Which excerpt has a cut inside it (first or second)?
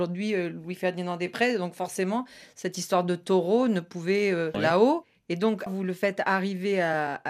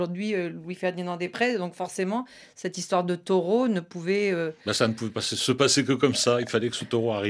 first